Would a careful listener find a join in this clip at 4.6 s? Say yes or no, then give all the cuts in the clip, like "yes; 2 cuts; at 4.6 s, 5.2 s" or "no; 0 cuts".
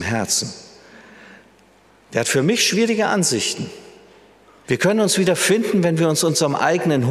yes; 1 cut; at 4.6 s